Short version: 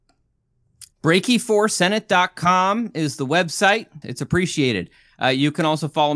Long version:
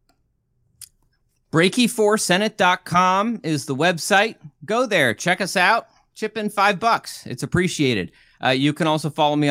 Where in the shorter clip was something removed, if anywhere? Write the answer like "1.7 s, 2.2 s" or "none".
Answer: 0.9 s, 4.0 s